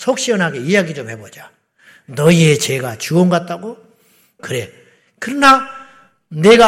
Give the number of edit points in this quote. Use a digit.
1